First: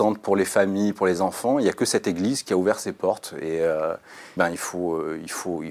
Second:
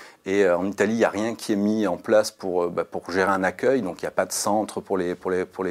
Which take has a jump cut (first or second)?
first